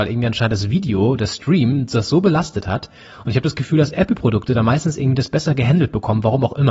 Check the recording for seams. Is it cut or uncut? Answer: uncut